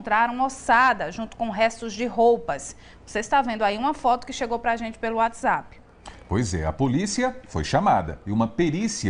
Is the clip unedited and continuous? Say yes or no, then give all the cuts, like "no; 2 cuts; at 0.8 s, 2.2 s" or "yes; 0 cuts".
yes; 0 cuts